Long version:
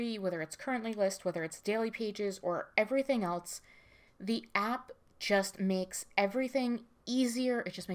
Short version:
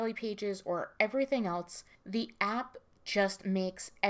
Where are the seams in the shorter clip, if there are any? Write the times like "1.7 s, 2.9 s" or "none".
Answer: 1.9 s